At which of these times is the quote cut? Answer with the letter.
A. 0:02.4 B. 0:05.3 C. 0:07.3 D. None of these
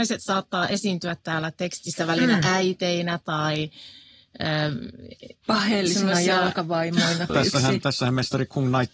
C